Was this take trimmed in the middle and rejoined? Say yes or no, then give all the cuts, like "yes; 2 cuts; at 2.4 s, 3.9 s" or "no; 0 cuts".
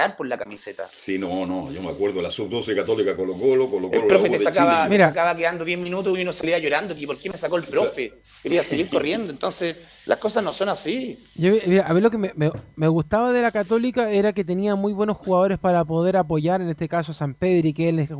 no; 0 cuts